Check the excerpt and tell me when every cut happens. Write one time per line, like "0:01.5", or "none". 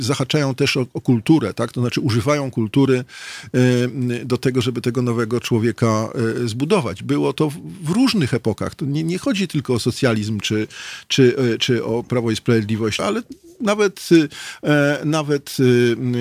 0:13.0